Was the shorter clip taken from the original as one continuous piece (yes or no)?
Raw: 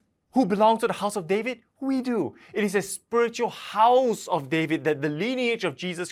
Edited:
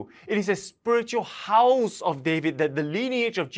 yes